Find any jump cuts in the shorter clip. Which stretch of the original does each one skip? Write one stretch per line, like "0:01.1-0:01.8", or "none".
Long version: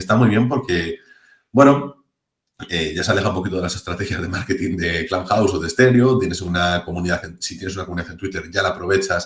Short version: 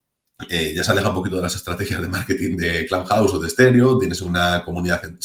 none